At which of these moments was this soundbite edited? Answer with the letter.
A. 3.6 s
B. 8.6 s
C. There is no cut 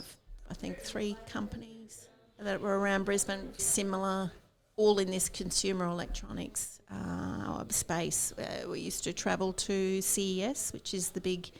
A